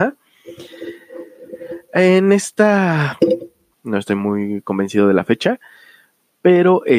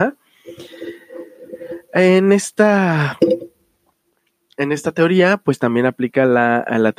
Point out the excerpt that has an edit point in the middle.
first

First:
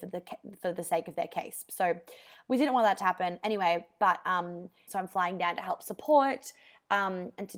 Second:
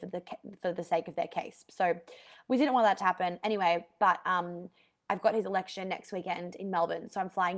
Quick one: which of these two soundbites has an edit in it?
first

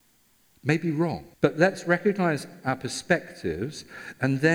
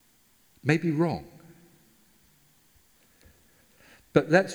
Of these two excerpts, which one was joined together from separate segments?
first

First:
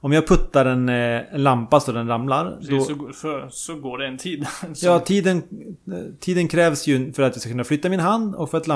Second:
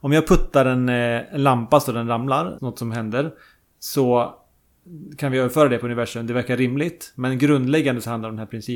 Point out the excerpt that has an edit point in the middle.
second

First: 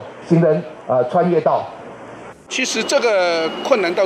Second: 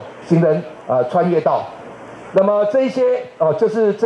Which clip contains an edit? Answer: first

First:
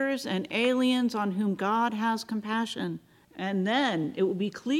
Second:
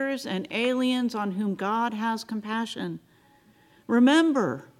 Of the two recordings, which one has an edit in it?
first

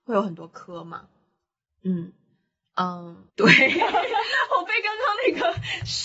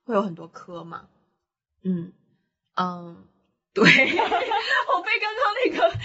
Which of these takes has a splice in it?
first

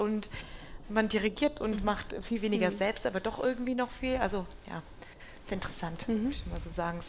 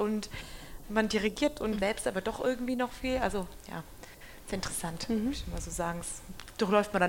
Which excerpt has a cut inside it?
second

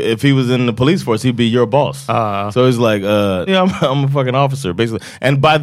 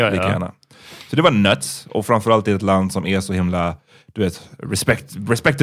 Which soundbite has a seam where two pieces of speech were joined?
first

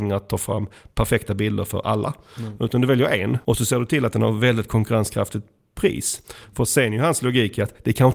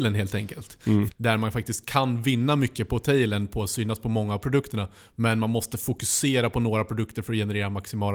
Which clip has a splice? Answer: second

